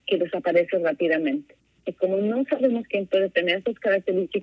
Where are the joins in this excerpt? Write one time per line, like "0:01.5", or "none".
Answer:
0:01.8